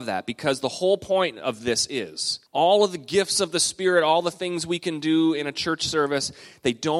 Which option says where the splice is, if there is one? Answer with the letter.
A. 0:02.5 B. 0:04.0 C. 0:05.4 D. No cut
A